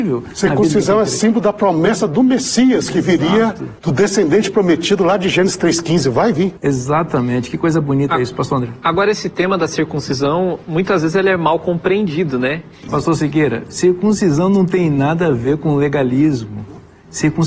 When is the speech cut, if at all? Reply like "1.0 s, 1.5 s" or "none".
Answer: 12.9 s